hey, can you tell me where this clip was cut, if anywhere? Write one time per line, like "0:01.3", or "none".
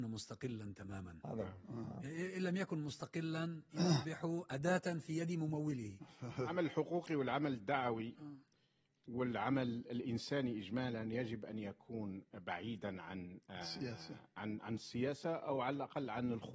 none